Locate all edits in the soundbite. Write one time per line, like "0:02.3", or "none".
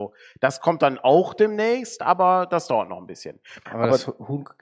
0:03.7

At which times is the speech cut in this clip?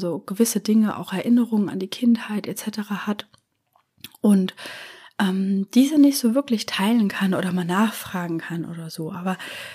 none

